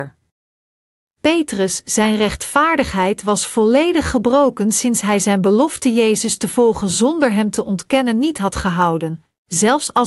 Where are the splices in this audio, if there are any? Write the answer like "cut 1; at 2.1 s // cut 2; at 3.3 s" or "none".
cut 1; at 1.1 s

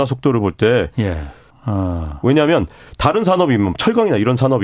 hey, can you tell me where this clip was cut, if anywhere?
cut 1; at 1.5 s

